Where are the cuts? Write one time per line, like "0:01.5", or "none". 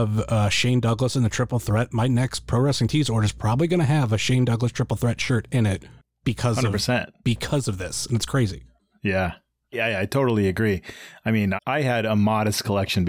0:09.7
0:11.6